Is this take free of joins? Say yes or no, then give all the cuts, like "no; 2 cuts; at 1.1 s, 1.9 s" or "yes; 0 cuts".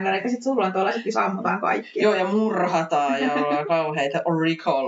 yes; 0 cuts